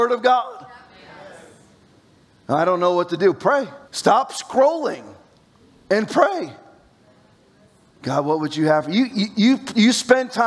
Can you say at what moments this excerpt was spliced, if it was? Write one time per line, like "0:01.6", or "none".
0:03.8